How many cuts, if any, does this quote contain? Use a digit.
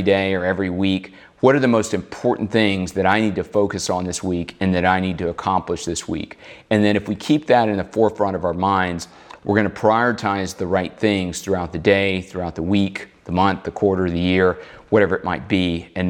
0